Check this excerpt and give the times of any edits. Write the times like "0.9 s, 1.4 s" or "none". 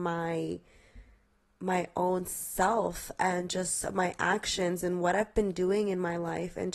none